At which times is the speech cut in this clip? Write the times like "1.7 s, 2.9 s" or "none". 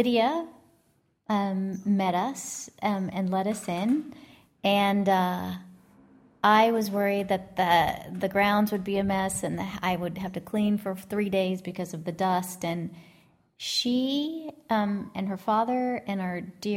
none